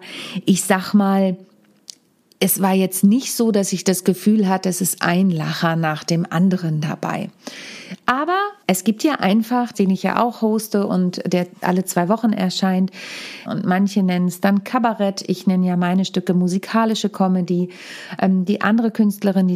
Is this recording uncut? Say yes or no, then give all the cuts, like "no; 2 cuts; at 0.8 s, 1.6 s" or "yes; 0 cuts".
no; 3 cuts; at 8.6 s, 9.7 s, 13.5 s